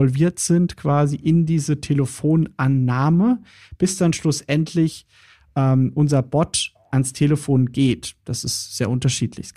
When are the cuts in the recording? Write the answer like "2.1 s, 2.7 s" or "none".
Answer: none